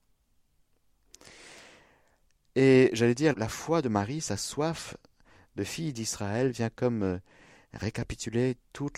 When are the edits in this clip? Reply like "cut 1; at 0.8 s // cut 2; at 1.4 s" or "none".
cut 1; at 3.3 s